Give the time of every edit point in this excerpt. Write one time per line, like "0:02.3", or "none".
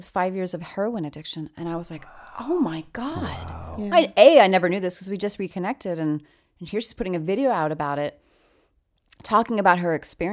none